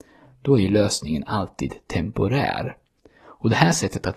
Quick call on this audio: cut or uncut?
cut